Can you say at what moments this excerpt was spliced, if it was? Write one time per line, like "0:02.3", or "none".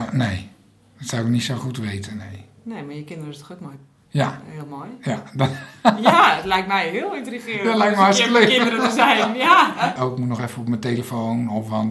0:10.0

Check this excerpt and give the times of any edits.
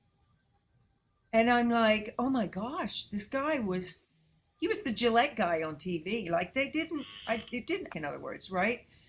0:06.2
0:07.9

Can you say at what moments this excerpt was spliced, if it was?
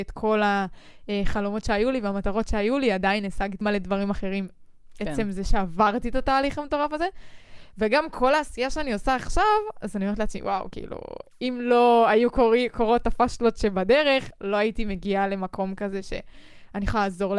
0:03.6

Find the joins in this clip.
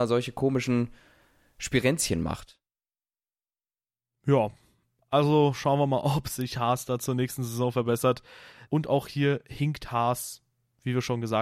0:08.7

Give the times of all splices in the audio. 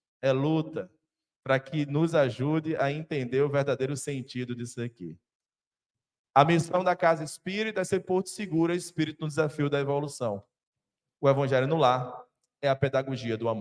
none

